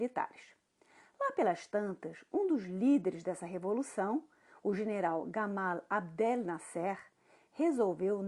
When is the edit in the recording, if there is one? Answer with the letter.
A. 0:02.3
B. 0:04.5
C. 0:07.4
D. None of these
C